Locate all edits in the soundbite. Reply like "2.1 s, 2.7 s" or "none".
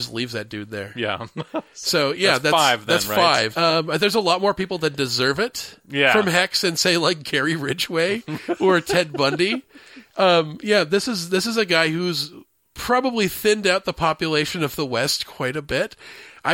3.5 s